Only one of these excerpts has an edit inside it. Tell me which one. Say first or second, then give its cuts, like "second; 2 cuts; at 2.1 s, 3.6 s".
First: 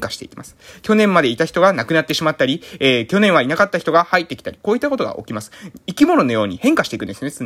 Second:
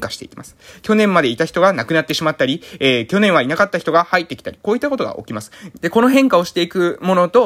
second; 1 cut; at 5.8 s